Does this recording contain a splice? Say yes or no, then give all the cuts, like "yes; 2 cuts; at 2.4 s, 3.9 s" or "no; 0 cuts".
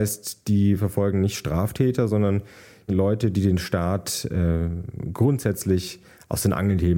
no; 0 cuts